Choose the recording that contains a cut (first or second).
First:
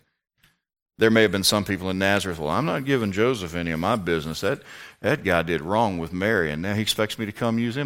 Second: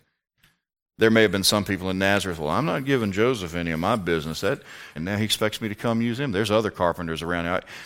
second